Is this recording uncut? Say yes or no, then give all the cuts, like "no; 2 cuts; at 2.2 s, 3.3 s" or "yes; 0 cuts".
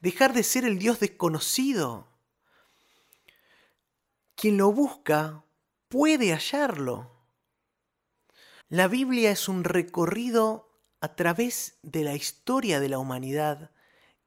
no; 1 cut; at 8.6 s